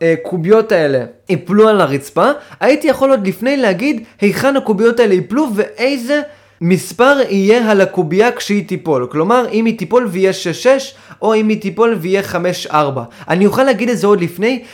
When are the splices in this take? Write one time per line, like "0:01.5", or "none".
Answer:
none